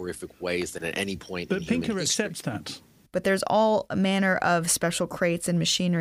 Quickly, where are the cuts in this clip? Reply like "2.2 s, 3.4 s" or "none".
3.1 s

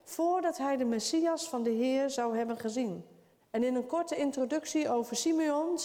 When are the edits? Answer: 3.4 s

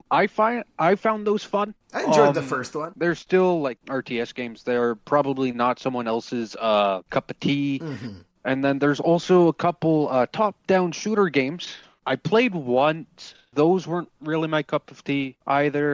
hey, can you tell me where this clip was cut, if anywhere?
none

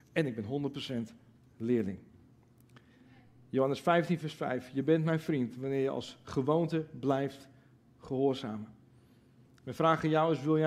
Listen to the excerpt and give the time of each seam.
4.2 s

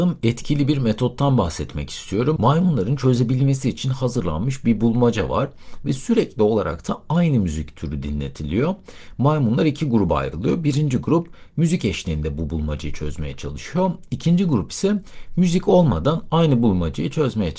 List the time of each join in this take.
2.4 s

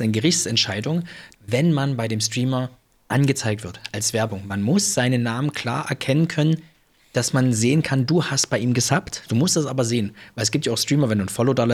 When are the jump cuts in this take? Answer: 1.3 s, 9.3 s

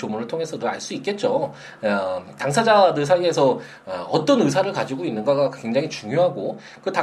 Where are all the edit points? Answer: none

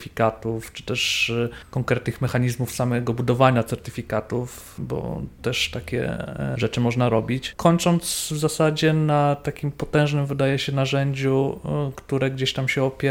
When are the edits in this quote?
none

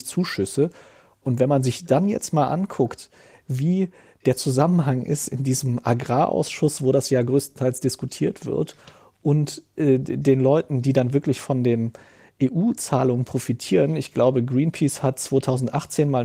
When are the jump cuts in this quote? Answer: none

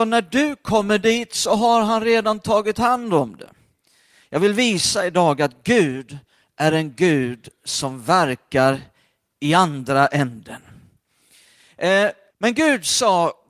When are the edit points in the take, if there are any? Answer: 12.3 s

